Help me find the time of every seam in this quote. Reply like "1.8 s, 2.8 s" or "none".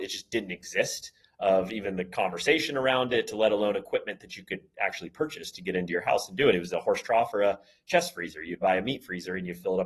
none